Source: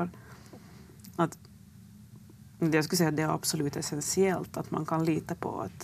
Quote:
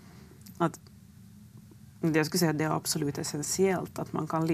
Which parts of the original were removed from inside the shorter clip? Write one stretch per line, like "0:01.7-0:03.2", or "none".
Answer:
none